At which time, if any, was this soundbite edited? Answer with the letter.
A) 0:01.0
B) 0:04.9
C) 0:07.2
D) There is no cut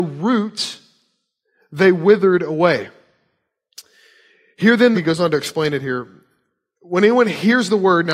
B